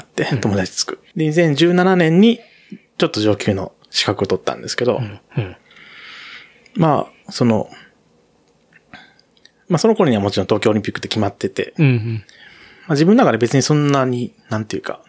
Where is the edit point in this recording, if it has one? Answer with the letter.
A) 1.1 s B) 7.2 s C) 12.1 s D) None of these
A